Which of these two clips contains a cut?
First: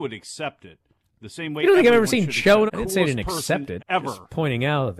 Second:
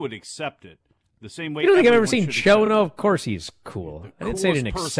first; 2 cuts; at 2.7 s, 3.8 s

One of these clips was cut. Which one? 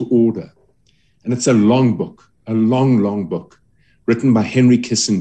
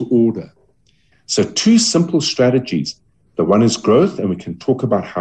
second; 1 cut; at 1.1 s

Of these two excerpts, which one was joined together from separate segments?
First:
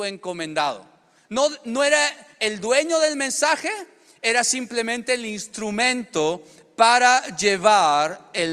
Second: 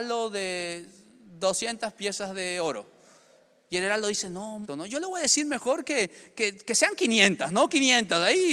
second; 1 cut; at 4.7 s

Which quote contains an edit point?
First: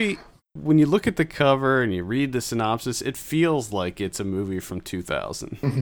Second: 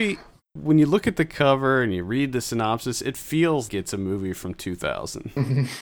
second; 1 cut; at 3.7 s

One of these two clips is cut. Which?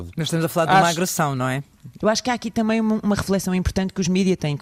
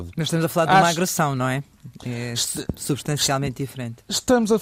first; 1 cut; at 2.0 s

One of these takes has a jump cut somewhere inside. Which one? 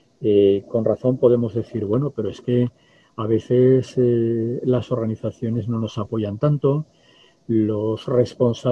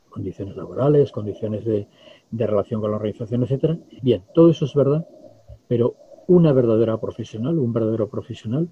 second; 2 cuts; at 4.0 s, 5.6 s

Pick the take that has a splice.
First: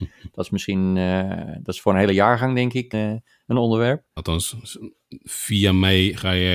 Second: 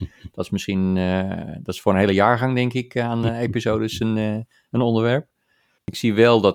first; 2 cuts; at 2.9 s, 4.2 s

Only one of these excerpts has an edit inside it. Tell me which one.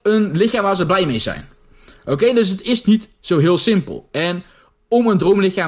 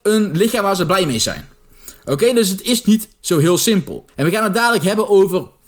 second; 1 cut; at 4.1 s

